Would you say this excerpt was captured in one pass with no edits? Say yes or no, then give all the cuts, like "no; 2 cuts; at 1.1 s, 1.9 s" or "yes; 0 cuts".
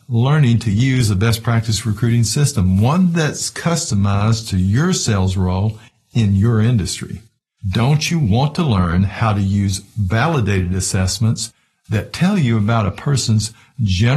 no; 1 cut; at 7.6 s